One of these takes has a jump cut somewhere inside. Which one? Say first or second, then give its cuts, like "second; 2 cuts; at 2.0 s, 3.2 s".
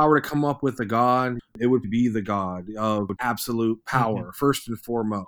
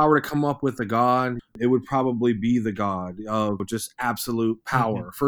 first; 2 cuts; at 1.8 s, 3.2 s